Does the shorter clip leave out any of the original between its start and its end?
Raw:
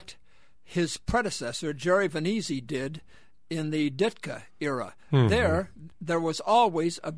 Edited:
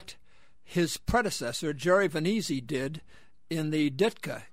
no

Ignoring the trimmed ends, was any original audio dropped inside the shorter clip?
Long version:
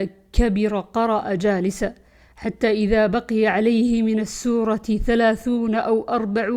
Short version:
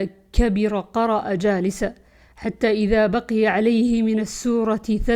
no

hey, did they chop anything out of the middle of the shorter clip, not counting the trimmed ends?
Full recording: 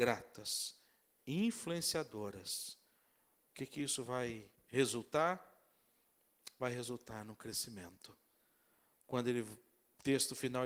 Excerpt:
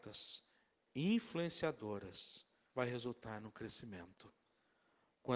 yes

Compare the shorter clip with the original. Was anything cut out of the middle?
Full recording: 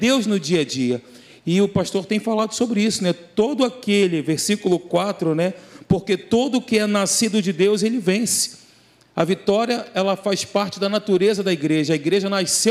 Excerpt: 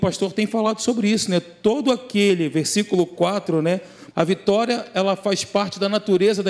yes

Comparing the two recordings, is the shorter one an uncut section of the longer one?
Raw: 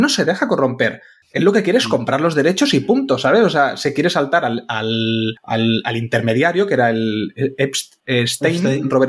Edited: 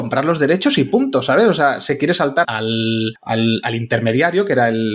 no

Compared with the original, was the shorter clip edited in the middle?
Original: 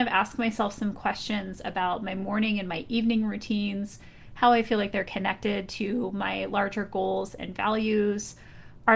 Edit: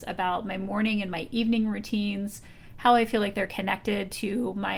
no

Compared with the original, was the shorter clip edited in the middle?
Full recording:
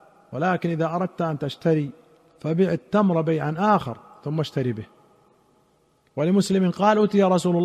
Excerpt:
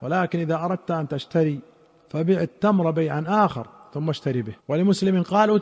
yes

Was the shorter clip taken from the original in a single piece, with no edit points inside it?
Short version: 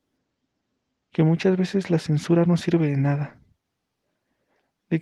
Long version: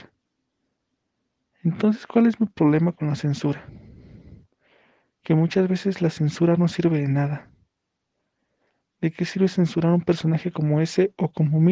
no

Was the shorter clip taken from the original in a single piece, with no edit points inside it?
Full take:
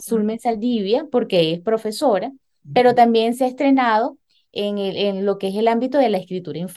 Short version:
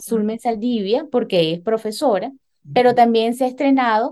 yes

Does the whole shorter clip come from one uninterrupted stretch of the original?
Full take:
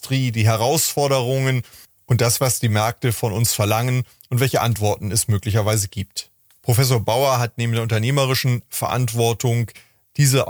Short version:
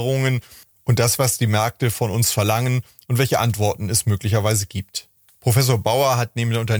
yes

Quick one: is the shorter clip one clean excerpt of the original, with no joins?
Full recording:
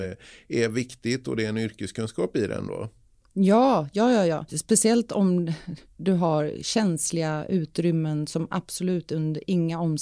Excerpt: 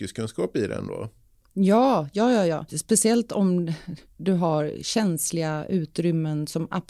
yes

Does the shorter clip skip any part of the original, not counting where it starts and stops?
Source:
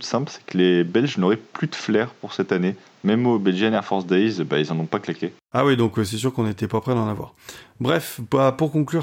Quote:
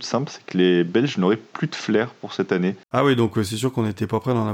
yes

